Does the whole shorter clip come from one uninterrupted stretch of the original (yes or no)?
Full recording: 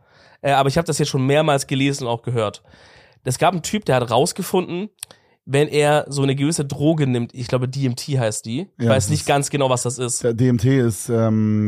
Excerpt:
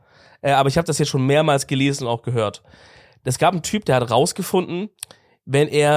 yes